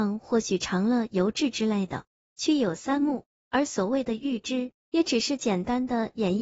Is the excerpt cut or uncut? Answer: cut